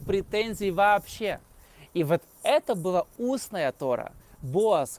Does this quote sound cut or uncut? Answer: uncut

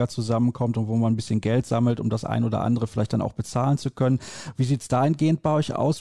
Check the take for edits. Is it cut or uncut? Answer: uncut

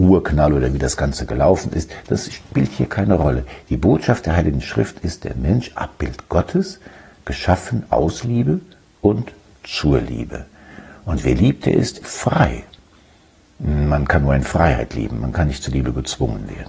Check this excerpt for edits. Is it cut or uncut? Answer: cut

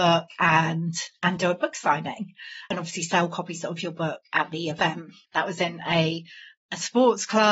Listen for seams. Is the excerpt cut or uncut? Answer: cut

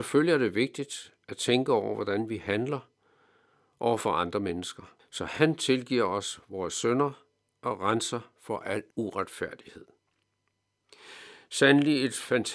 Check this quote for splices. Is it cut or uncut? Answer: cut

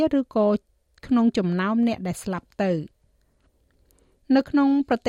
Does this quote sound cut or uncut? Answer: uncut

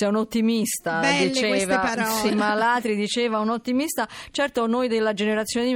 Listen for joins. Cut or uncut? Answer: cut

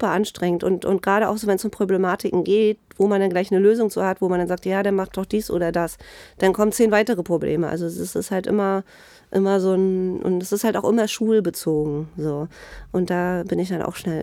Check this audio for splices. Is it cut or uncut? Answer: uncut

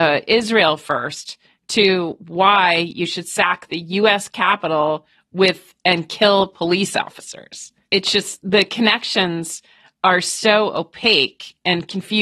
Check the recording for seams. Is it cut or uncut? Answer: uncut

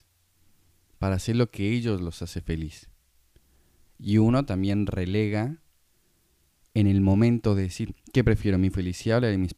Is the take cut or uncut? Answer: uncut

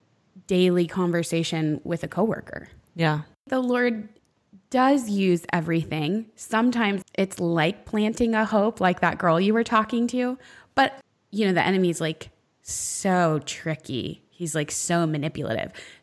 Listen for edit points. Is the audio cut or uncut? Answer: uncut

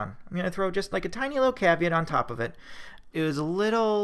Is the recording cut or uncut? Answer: cut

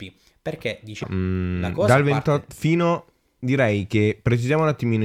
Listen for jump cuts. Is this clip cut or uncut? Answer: cut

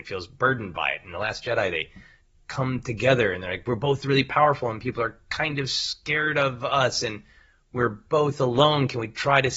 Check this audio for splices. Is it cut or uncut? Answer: uncut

